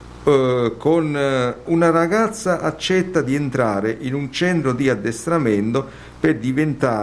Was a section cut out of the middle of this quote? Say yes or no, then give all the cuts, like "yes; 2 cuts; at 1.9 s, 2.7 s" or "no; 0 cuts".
yes; 1 cut; at 1.7 s